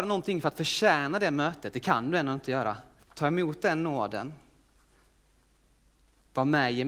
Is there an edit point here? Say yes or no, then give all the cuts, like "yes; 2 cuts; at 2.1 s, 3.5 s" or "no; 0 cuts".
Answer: yes; 1 cut; at 3.0 s